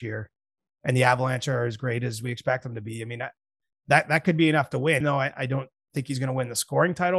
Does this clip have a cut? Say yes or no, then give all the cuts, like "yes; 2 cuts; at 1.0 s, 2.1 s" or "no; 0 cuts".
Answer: yes; 1 cut; at 5.0 s